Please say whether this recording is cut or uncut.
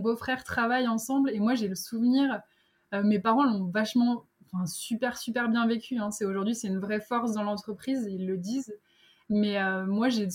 uncut